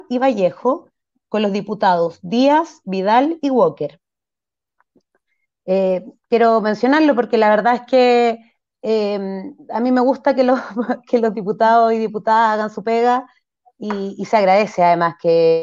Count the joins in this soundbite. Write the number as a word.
one